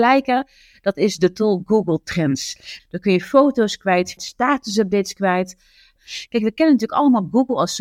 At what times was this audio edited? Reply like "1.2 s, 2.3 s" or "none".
2.8 s, 4.2 s, 6.0 s